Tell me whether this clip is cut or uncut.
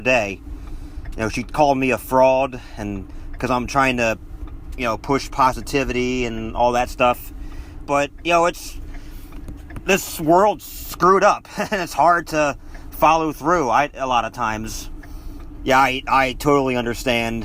cut